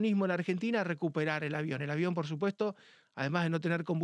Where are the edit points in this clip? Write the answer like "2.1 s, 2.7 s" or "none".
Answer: none